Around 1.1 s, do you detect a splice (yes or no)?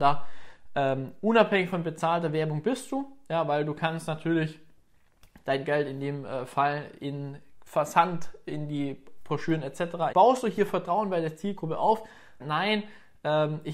no